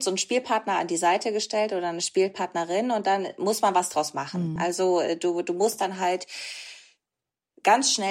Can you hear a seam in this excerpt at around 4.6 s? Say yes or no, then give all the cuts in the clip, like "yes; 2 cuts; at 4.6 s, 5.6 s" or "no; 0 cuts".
no; 0 cuts